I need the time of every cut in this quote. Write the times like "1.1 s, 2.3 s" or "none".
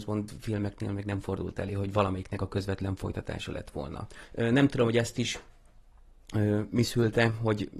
4.2 s